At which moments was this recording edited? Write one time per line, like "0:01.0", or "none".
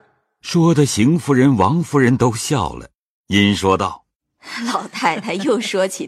none